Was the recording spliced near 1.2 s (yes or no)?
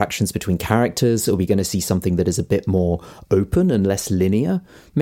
no